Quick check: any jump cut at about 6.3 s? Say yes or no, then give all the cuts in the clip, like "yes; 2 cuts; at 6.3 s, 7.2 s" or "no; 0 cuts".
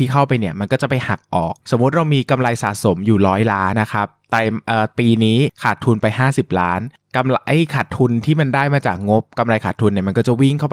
no; 1 cut; at 3.7 s